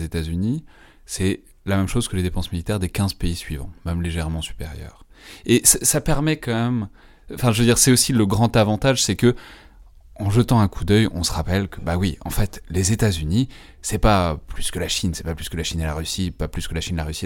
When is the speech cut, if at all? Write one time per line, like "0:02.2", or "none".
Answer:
none